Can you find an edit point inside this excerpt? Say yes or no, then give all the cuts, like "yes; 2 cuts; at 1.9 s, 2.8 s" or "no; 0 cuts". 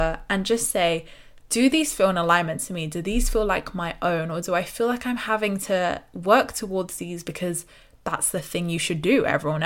no; 0 cuts